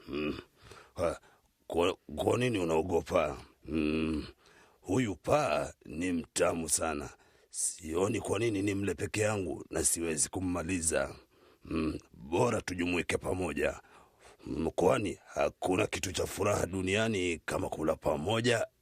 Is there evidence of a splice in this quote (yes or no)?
yes